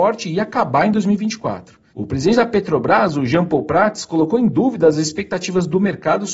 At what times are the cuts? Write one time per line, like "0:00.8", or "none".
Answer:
0:01.9